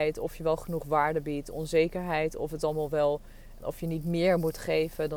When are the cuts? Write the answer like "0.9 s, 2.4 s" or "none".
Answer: 3.6 s